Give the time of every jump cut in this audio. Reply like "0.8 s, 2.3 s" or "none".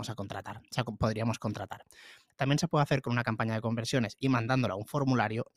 2.3 s